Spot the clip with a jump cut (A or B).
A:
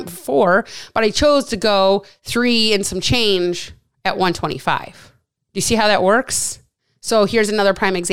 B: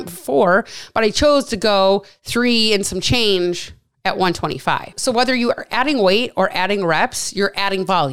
B